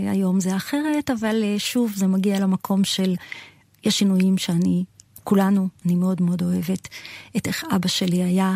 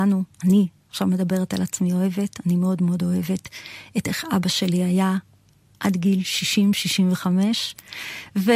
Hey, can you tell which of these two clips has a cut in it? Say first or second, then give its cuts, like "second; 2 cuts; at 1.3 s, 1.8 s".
first; 1 cut; at 5.8 s